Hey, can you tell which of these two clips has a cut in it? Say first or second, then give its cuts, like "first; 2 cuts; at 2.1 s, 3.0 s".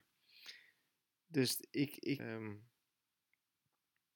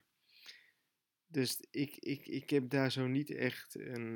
first; 1 cut; at 2.2 s